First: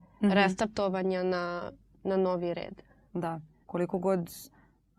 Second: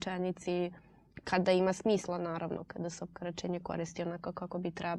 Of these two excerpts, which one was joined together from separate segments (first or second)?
first